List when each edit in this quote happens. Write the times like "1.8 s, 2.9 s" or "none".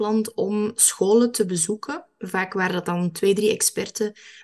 none